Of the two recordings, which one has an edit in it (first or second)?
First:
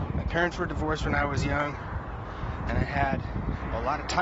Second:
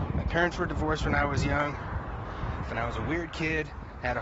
second